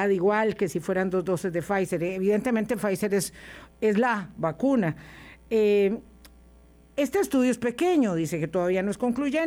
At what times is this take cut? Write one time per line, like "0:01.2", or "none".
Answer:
none